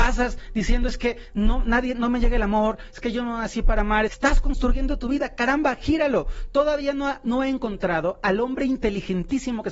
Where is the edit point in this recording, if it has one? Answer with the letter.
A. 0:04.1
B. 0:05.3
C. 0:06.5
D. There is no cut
A